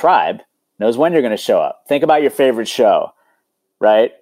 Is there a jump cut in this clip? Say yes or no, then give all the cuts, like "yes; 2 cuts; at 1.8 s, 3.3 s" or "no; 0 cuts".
no; 0 cuts